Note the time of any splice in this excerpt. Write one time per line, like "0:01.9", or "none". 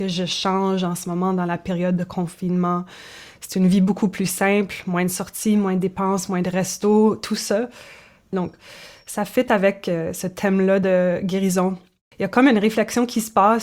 0:08.3
0:12.1